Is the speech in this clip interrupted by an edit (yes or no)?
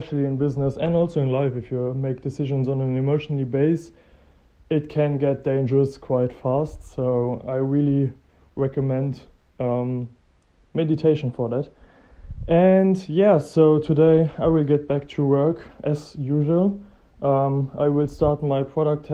no